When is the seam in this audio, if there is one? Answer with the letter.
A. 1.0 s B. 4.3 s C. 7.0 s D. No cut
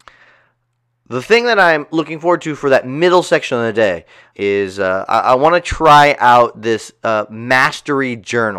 B